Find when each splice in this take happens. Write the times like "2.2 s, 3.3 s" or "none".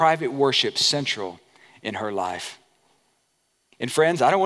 none